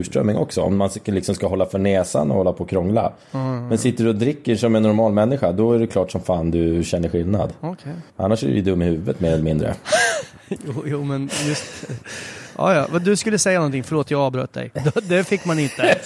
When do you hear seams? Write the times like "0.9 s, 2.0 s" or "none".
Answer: 8.1 s, 14.8 s